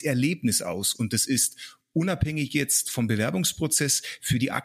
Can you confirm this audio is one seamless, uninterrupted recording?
no; 1 cut; at 0.9 s

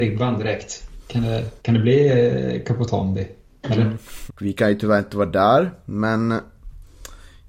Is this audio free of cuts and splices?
no; 2 cuts; at 1.6 s, 4.3 s

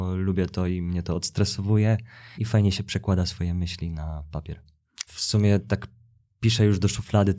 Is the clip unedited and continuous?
no; 2 cuts; at 2.3 s, 5.1 s

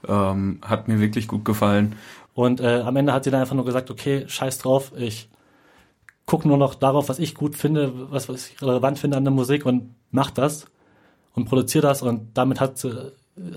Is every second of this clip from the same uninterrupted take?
no; 1 cut; at 2.3 s

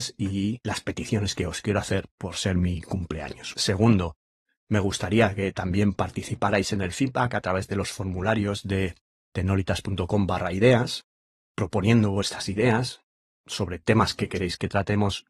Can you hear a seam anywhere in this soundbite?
yes; 1 cut; at 3.5 s

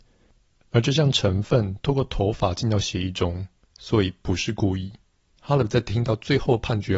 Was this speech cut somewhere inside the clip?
yes; 1 cut; at 5.3 s

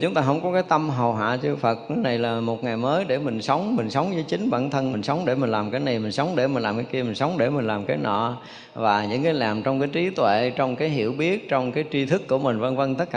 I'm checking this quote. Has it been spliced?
yes; 1 cut; at 4.9 s

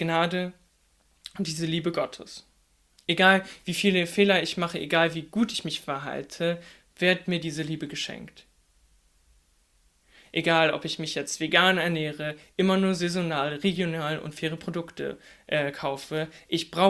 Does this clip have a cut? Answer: yes; 1 cut; at 2.9 s

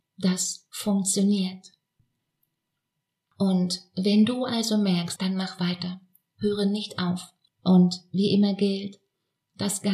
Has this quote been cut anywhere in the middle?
yes; 2 cuts; at 5.2 s, 7.5 s

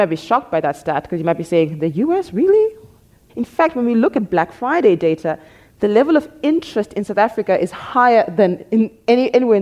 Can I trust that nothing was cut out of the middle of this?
no; 1 cut; at 3.3 s

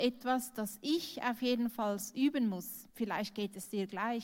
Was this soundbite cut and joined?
yes; 1 cut; at 2.9 s

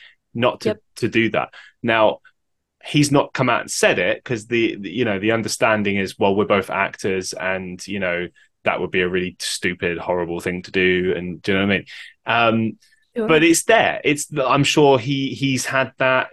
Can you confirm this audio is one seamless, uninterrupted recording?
yes; 0 cuts

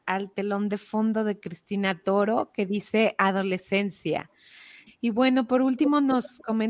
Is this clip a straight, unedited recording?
no; 1 cut; at 4.9 s

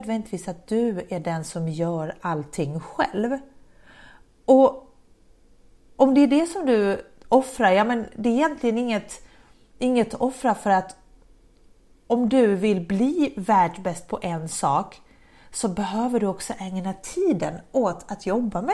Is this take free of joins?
yes; 0 cuts

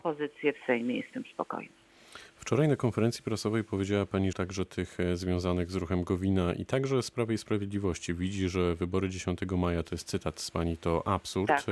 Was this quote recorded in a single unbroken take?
no; 1 cut; at 4.3 s

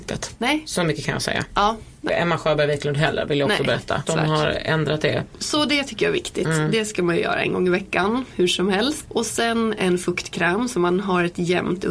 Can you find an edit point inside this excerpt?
yes; 2 cuts; at 2.1 s, 4.1 s

